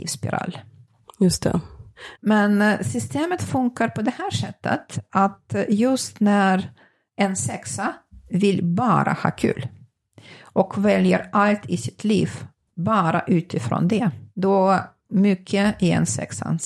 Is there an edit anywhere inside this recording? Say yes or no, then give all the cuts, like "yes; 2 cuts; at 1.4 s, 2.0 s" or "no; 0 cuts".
yes; 1 cut; at 2.2 s